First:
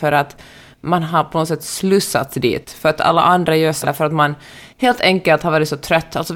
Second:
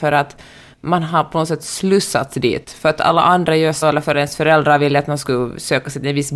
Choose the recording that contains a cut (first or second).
first